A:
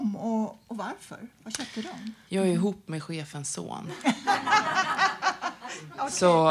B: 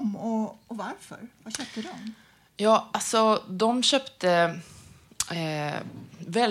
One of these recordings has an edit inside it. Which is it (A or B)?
A